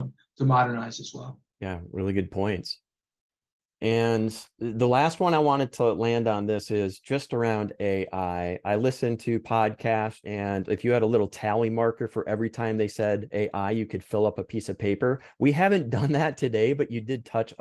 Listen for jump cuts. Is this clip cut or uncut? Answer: cut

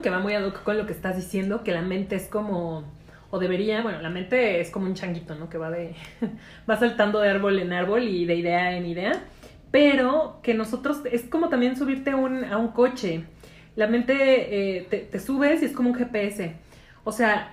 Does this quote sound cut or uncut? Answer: uncut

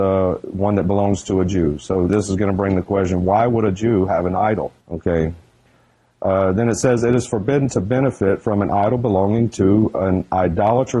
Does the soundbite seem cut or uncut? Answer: cut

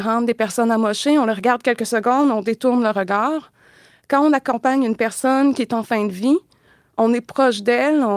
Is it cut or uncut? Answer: uncut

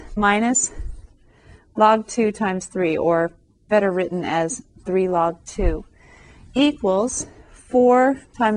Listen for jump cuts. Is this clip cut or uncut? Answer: uncut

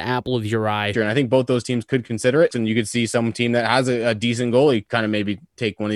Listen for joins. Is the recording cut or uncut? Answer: cut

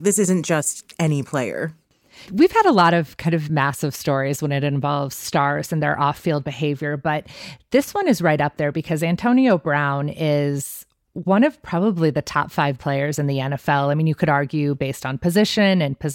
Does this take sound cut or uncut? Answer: cut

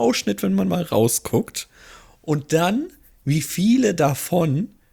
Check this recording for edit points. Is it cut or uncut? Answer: uncut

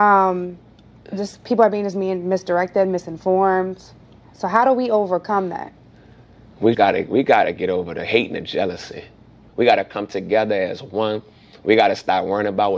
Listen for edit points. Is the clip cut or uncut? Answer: cut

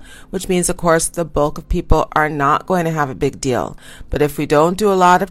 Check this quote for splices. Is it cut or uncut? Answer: uncut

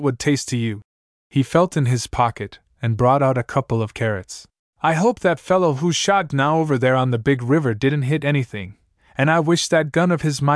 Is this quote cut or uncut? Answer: cut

